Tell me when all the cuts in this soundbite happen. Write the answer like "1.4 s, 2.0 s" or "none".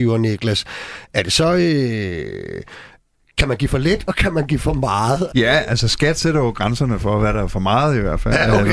5.3 s